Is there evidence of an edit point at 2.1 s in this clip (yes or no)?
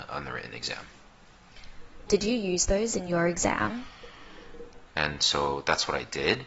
yes